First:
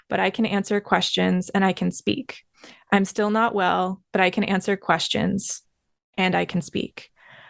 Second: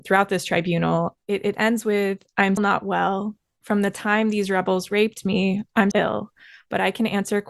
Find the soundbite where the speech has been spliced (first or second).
second